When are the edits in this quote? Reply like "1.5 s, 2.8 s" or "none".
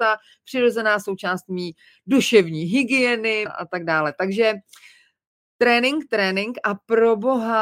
3.5 s, 6.1 s